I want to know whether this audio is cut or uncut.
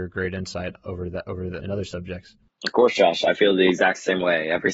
cut